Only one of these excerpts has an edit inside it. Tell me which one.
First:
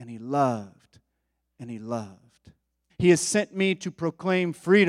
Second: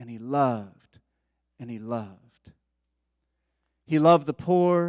first; 1 cut; at 2.9 s

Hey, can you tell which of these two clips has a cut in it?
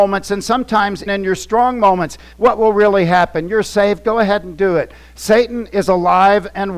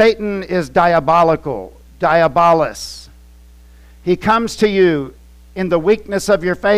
first; 2 cuts; at 1.1 s, 2.3 s

